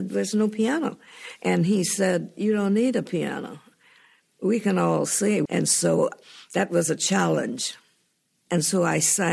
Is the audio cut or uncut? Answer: cut